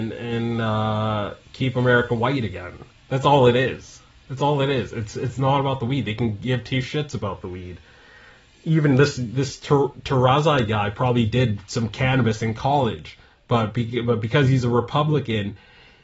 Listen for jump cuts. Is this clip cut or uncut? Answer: uncut